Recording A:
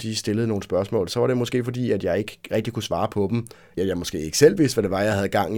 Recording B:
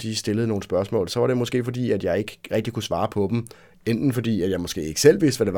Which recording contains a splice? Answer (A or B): A